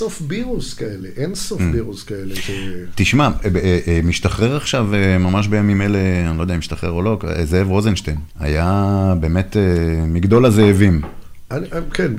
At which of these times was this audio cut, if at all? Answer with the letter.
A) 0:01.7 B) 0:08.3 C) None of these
B